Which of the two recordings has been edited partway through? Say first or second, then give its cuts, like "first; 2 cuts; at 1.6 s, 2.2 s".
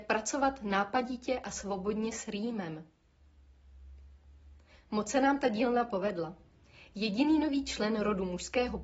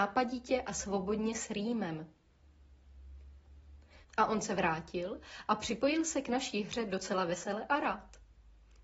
second; 1 cut; at 4.0 s